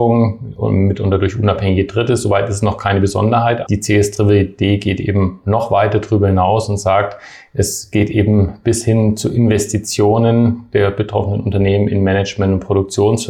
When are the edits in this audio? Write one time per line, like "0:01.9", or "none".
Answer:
0:03.7